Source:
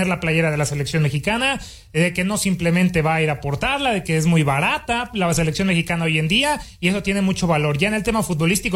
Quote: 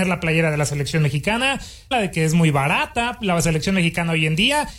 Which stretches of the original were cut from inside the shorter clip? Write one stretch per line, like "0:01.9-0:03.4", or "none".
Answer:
0:01.9-0:03.8